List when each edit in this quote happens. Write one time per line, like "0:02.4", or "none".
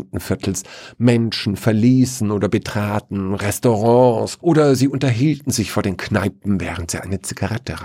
0:04.4